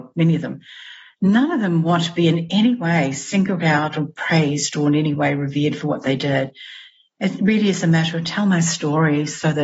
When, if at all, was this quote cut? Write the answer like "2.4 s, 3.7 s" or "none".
none